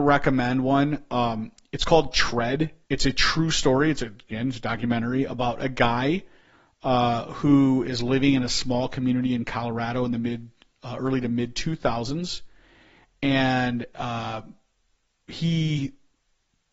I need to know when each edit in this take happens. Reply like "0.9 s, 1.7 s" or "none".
2.8 s